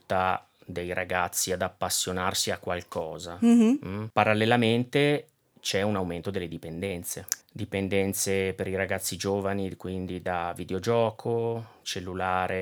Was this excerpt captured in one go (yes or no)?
yes